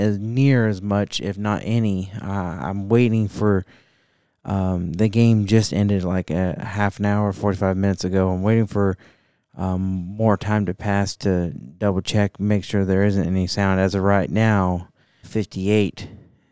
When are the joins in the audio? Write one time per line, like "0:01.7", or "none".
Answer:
0:15.2